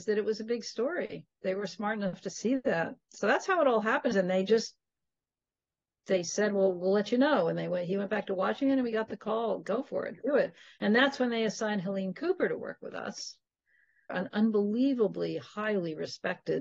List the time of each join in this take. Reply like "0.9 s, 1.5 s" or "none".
4.1 s, 14.1 s